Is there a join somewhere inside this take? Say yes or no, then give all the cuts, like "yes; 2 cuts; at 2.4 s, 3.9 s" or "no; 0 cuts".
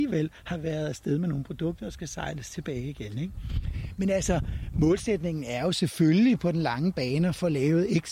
no; 0 cuts